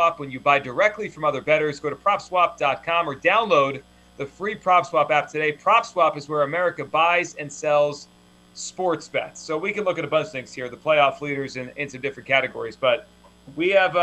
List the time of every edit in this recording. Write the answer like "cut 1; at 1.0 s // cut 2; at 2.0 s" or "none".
none